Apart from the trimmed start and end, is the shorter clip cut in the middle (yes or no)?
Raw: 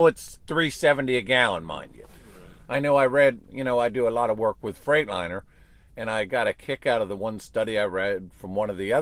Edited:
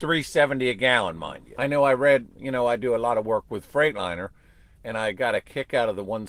yes